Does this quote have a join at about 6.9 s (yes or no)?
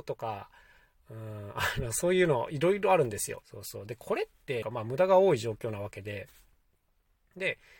no